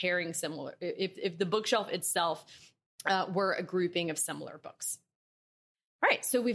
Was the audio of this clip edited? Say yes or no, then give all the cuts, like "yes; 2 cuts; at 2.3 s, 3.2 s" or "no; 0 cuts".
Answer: no; 0 cuts